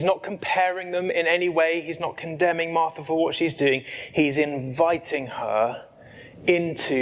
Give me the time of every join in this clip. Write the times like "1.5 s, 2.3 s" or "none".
none